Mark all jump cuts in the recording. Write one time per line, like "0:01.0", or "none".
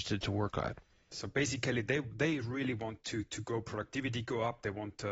0:01.1